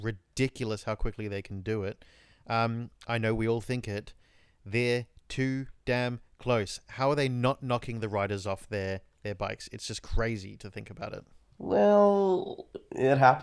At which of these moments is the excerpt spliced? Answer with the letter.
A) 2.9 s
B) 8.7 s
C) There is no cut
A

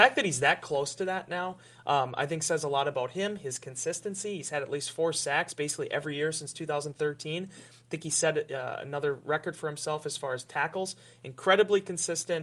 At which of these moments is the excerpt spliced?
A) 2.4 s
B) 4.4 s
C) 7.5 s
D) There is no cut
D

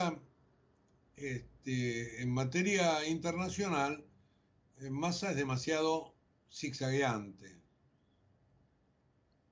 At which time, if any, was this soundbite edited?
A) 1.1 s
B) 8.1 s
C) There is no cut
C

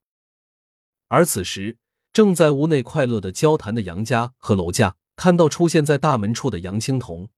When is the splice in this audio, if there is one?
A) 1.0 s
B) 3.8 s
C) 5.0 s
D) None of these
C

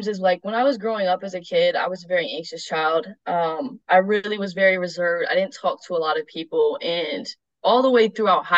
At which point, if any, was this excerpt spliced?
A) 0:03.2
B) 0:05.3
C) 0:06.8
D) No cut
D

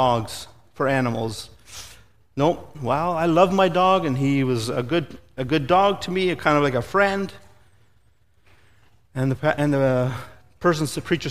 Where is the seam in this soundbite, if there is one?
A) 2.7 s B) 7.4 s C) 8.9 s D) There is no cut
A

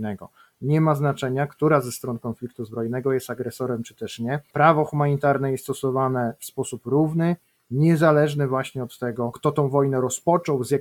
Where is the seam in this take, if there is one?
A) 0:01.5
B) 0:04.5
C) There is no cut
C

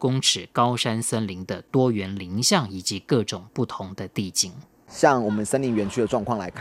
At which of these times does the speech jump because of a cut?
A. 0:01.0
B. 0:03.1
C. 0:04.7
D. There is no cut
D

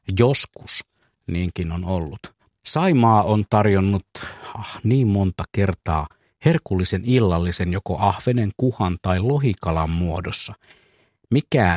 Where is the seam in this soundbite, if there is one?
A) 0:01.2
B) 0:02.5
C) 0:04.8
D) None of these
B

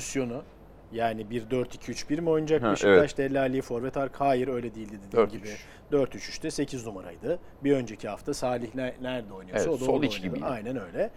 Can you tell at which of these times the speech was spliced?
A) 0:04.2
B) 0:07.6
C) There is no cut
C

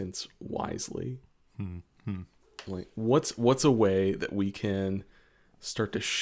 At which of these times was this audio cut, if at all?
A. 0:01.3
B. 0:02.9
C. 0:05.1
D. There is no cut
D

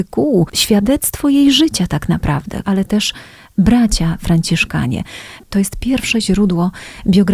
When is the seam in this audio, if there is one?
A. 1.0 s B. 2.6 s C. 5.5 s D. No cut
B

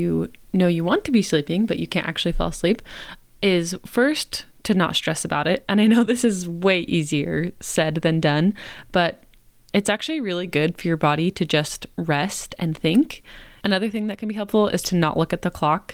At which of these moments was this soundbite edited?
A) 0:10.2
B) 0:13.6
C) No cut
B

